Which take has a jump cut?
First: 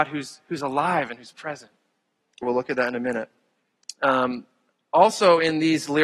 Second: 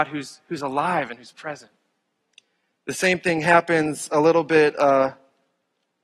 first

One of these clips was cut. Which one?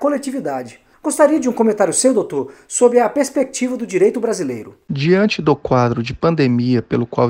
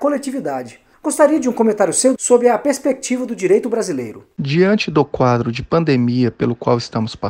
second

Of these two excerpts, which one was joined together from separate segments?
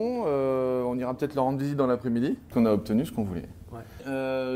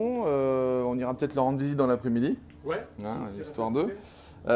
first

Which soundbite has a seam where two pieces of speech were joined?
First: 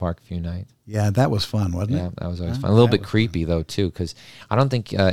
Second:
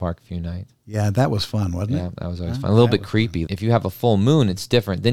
second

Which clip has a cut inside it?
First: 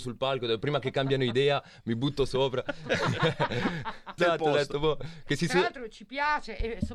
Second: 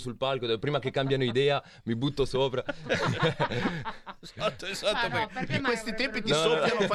first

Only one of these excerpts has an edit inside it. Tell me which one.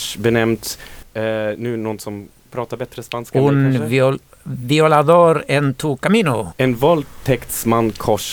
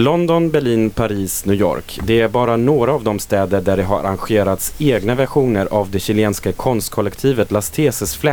first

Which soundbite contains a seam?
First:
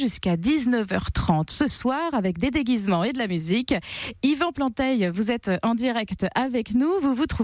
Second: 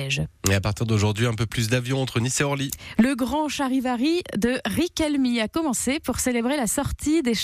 second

